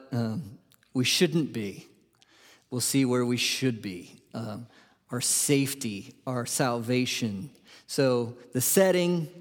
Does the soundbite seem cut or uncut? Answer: uncut